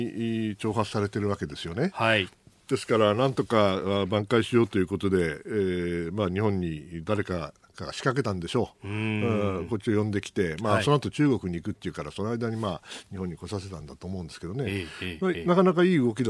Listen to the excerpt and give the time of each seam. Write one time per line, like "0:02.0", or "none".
none